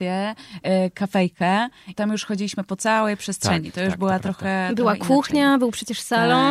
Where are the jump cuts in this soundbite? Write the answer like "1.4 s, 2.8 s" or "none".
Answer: 1.9 s

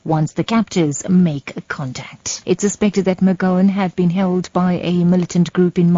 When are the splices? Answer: 2.4 s

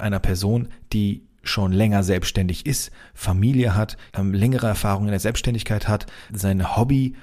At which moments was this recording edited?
4.1 s, 6.3 s

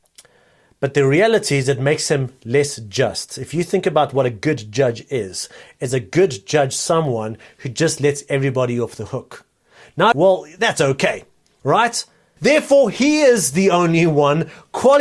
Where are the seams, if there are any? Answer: 10.1 s, 12.4 s

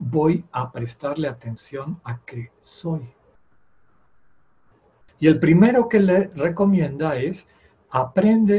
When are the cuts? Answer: 5.1 s

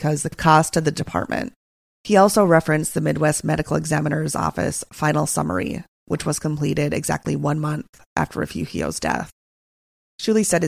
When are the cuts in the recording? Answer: none

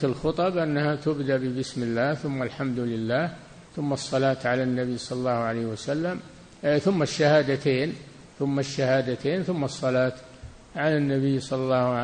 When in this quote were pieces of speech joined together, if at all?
3.7 s, 8.3 s

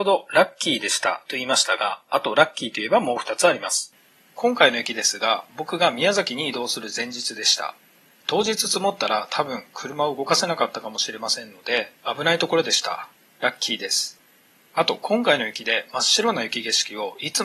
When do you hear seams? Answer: none

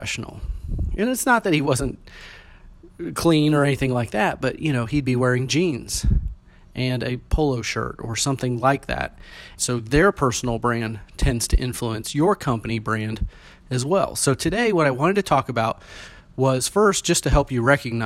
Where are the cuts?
9.6 s

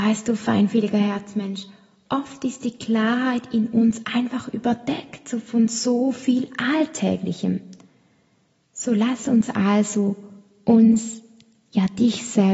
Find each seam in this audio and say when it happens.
8.6 s

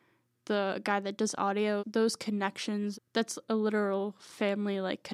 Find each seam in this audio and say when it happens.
1.8 s, 2.9 s

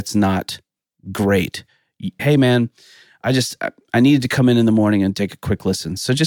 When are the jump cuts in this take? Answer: 2.2 s

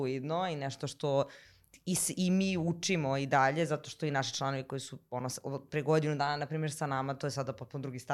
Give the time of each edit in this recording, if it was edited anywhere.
none

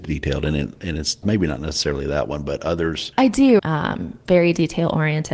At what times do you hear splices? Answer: 1.2 s, 3.6 s

